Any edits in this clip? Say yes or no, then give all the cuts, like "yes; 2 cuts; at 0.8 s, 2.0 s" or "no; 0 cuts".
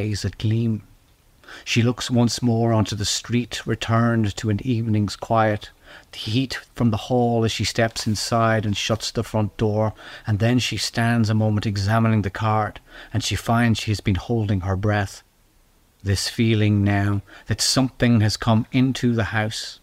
no; 0 cuts